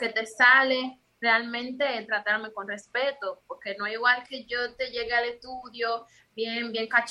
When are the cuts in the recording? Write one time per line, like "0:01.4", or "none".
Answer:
0:04.2